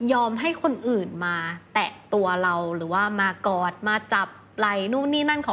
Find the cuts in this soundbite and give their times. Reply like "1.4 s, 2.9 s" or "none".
none